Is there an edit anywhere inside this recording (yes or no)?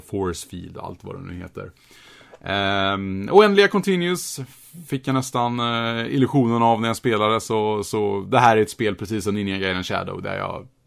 no